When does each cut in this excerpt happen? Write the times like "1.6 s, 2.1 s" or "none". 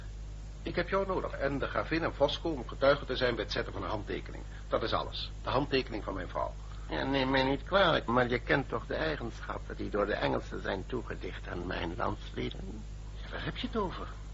1.3 s, 8.1 s